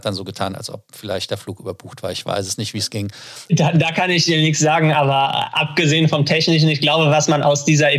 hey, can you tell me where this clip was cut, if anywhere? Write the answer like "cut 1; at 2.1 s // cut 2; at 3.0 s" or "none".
cut 1; at 3.5 s